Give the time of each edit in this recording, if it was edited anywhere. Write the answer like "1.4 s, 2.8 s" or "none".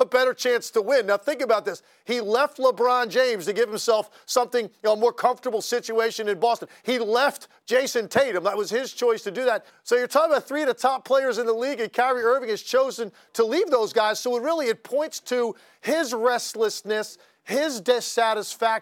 9.7 s

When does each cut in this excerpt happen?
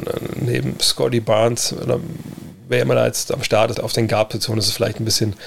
3.7 s

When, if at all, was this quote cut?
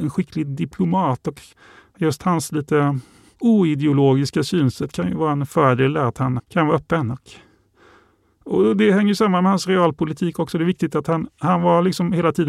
6.4 s

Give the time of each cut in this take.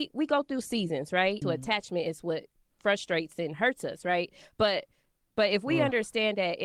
1.4 s

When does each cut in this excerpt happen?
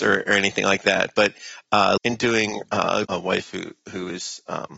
2.0 s, 3.0 s

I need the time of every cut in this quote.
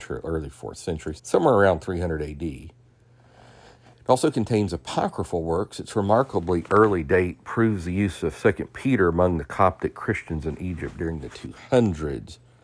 1.2 s

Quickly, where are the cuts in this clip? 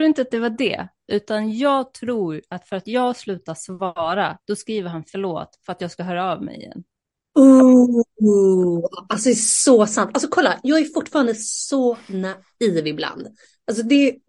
none

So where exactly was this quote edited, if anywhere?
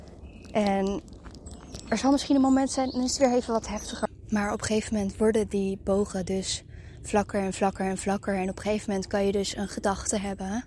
none

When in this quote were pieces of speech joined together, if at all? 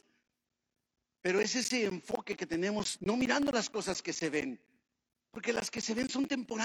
3.0 s

